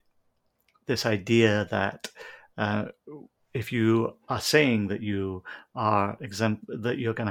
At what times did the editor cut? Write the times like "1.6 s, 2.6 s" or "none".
none